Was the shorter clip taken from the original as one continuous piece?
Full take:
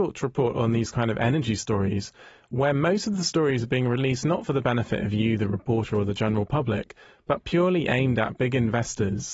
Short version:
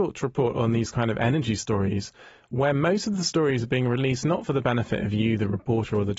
yes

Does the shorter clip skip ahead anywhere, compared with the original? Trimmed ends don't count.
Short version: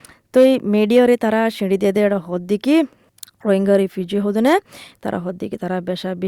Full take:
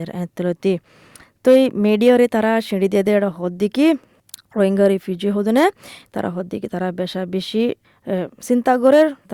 no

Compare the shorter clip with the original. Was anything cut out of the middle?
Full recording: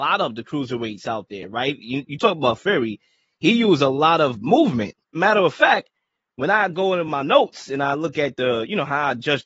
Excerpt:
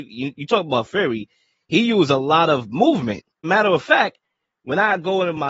no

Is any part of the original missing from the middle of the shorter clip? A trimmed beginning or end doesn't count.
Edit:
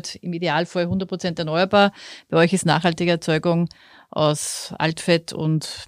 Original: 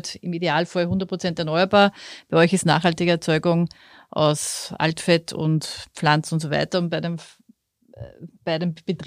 no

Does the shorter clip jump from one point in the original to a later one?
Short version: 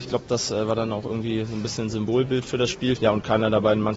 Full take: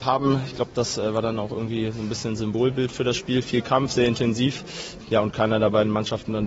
yes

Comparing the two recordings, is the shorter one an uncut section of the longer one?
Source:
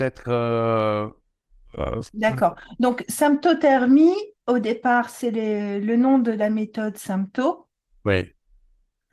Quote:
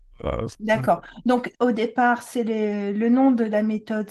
no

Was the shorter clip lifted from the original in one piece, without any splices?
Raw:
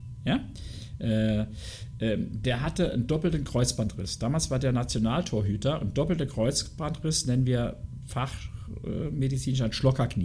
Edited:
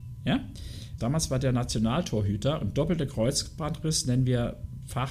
no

